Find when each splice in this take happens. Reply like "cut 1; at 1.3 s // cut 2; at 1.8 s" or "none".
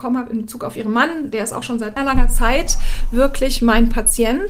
cut 1; at 2.0 s